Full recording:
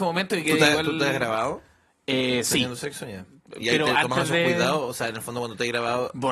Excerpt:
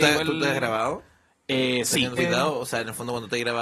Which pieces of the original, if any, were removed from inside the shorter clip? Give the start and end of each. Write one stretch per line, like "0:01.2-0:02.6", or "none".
0:02.8-0:04.4